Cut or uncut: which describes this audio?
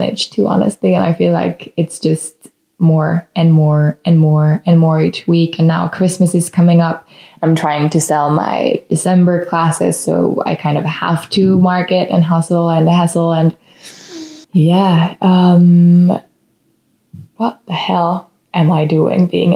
cut